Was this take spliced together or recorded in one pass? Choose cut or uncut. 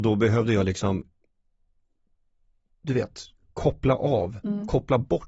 uncut